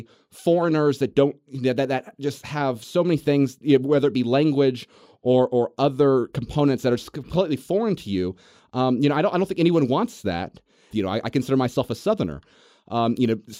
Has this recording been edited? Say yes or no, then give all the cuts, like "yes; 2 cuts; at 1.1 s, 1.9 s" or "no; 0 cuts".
yes; 1 cut; at 10.9 s